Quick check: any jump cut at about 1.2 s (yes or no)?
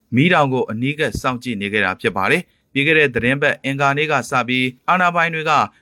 no